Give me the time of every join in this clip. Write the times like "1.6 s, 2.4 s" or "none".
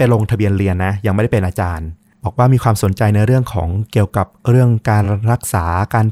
none